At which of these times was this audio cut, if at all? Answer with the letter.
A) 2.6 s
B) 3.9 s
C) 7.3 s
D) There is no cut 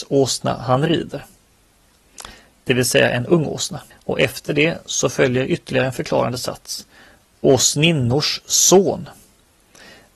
B